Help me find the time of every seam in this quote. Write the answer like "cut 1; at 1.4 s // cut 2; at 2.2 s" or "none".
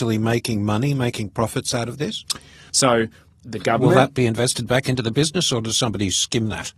cut 1; at 2.7 s